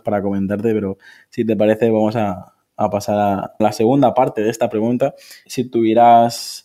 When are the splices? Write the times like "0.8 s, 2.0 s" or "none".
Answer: 3.6 s, 5.5 s